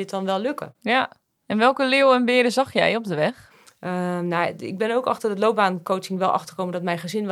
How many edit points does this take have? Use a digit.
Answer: 0